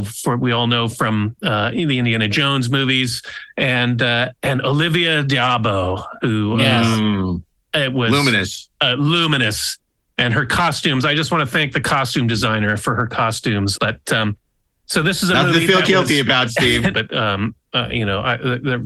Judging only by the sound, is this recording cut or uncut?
cut